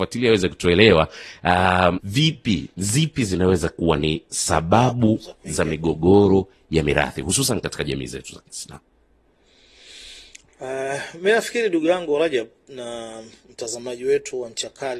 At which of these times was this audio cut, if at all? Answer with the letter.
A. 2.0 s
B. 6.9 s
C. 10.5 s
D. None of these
A